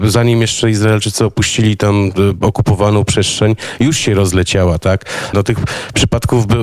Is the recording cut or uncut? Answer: cut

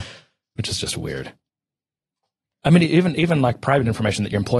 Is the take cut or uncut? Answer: cut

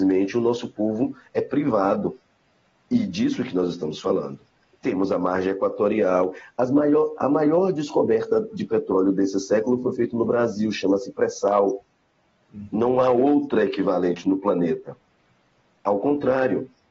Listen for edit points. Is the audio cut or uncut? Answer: uncut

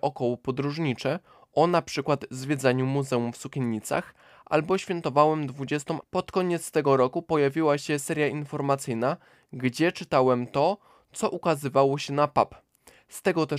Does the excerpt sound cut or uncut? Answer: cut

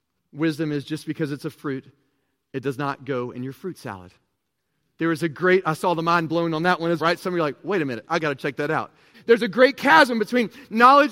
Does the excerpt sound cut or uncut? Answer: cut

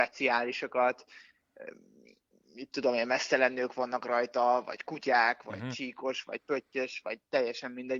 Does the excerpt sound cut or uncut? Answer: uncut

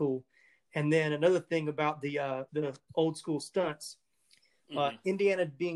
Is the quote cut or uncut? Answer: cut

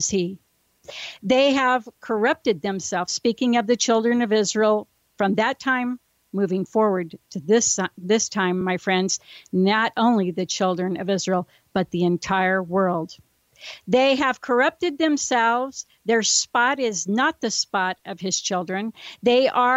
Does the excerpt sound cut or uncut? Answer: uncut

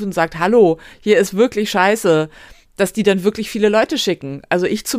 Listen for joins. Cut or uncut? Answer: uncut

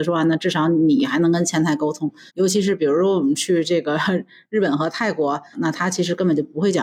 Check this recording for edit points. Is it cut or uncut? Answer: cut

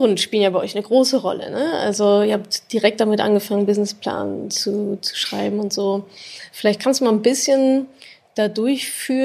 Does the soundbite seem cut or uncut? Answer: uncut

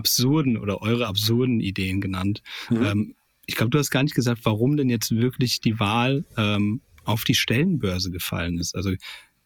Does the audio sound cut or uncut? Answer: uncut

